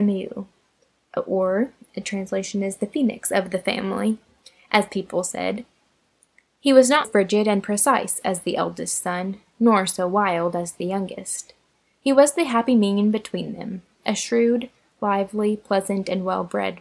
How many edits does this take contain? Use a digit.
1